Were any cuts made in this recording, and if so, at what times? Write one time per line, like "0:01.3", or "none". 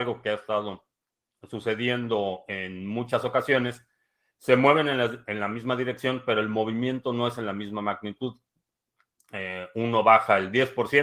none